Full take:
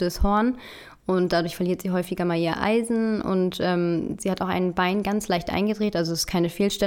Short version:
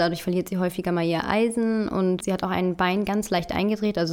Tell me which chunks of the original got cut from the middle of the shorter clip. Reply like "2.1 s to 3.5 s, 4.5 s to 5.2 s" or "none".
3.5 s to 4.2 s